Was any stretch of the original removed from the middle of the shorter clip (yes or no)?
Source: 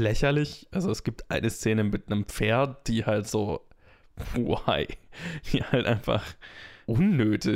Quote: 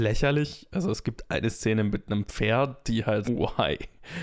yes